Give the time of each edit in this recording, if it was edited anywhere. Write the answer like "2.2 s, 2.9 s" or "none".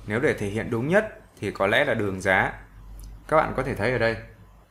3.2 s